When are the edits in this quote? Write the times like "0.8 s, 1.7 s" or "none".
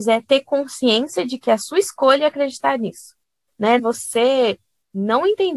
3.8 s